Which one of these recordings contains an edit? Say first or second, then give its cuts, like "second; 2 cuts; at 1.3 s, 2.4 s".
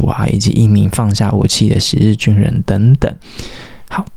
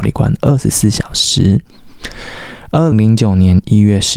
second; 1 cut; at 2.9 s